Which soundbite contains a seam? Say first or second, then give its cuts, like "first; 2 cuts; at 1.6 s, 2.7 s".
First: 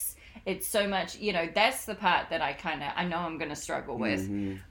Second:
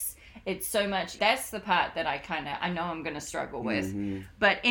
second; 1 cut; at 1.2 s